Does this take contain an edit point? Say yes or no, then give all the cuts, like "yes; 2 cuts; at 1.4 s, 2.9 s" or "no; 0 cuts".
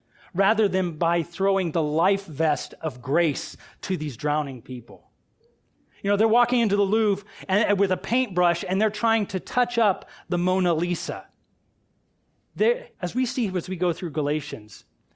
yes; 1 cut; at 12.9 s